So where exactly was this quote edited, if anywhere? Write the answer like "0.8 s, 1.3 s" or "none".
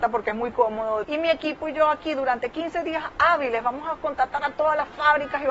1.0 s